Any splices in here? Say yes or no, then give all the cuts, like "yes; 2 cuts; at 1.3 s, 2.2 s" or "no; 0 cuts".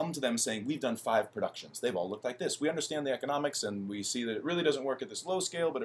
no; 0 cuts